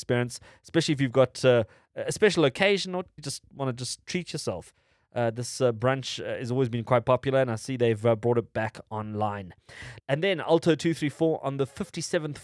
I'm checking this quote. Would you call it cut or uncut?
cut